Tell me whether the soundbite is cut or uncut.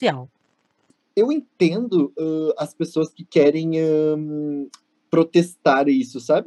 uncut